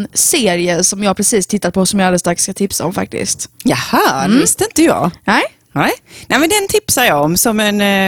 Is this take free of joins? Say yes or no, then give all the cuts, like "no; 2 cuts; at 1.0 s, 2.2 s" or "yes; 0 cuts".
yes; 0 cuts